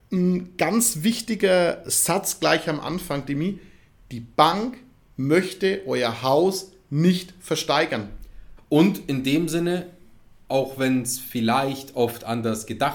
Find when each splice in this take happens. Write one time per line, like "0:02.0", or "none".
0:08.6